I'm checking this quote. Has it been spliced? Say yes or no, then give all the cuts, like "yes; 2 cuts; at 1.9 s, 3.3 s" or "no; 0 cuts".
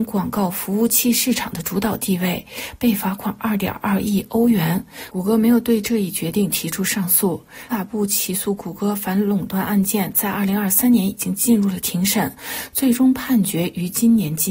yes; 1 cut; at 7.7 s